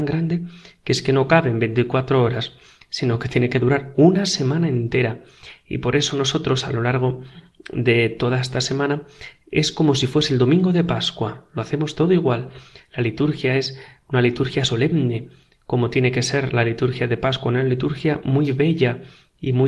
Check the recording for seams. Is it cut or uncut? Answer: uncut